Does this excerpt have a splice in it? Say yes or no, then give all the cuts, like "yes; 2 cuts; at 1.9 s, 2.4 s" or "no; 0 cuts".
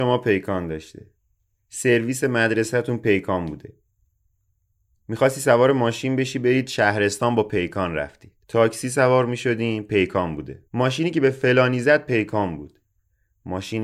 yes; 2 cuts; at 8.4 s, 10.7 s